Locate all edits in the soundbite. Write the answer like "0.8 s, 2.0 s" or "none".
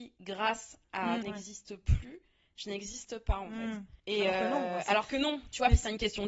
1.2 s, 4.0 s